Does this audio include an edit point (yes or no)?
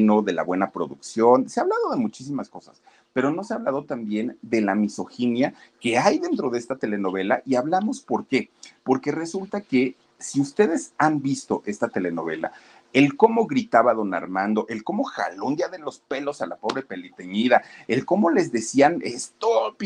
no